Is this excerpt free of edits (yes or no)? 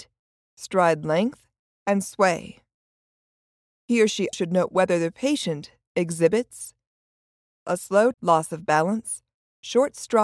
no